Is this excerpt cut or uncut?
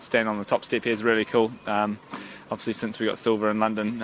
uncut